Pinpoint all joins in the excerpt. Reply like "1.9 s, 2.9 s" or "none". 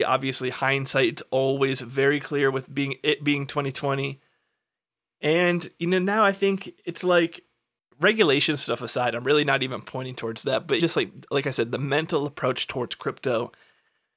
10.8 s